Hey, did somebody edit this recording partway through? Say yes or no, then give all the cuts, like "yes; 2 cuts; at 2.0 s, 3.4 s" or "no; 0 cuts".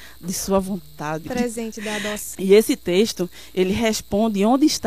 yes; 2 cuts; at 1.3 s, 2.3 s